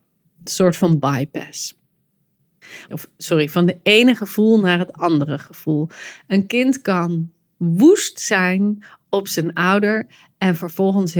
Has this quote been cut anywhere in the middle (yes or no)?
yes